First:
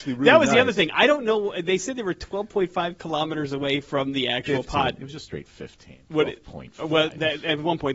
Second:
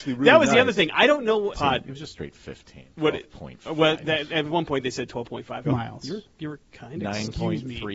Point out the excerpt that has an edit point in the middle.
second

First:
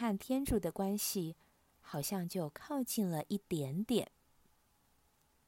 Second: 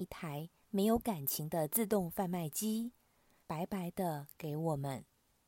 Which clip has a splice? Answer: second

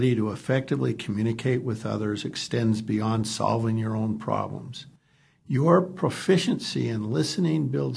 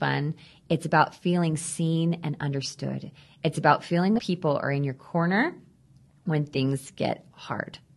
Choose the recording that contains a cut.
second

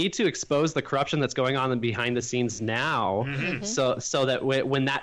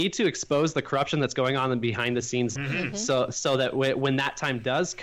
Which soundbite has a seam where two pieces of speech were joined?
second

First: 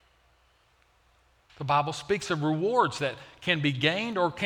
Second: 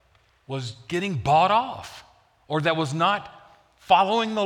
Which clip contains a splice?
first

